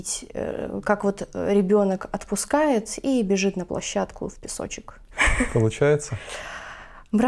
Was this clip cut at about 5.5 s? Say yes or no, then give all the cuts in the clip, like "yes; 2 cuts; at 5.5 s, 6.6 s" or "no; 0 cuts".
no; 0 cuts